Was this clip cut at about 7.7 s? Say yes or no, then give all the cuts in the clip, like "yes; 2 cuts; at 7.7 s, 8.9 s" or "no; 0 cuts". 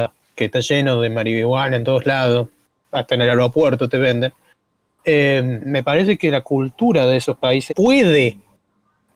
yes; 1 cut; at 7.7 s